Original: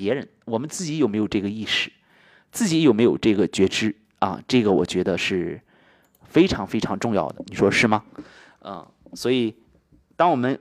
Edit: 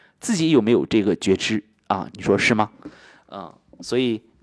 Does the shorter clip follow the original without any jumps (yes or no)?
no